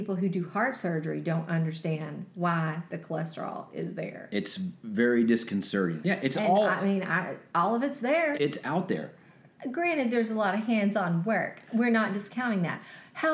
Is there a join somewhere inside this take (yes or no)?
yes